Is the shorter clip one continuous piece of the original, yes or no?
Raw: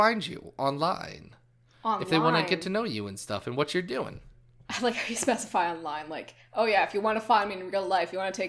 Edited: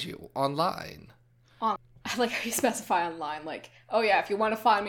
no